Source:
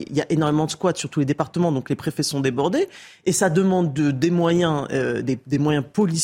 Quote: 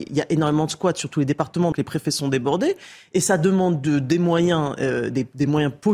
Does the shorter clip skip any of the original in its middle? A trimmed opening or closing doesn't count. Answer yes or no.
yes